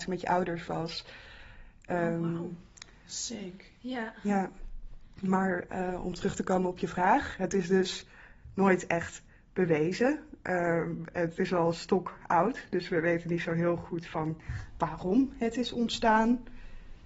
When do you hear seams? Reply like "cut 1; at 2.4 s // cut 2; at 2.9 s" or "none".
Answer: none